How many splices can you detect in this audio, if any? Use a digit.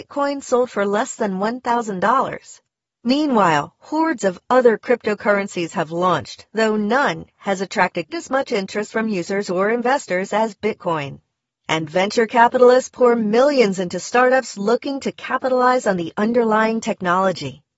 1